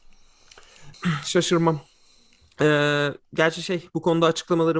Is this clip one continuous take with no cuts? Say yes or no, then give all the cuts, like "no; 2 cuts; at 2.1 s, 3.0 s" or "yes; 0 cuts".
no; 1 cut; at 0.9 s